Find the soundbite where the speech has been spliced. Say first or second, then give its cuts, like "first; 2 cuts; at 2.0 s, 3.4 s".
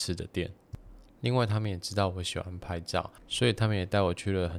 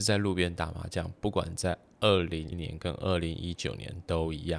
second; 1 cut; at 2.5 s